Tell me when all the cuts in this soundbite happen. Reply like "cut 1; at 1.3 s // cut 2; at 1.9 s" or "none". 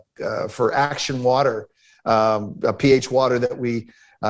cut 1; at 2.6 s